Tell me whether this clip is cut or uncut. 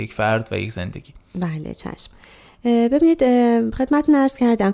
uncut